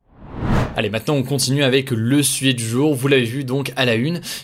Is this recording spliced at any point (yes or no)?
no